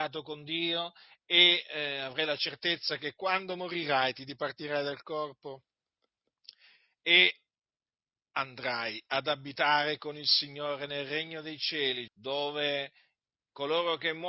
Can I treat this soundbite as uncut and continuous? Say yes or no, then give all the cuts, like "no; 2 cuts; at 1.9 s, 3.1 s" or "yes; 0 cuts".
no; 1 cut; at 12.1 s